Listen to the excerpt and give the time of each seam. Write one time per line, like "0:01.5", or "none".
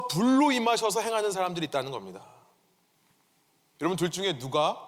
none